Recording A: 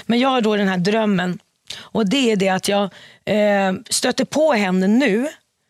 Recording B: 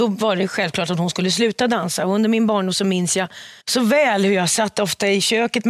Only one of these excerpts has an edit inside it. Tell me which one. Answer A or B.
B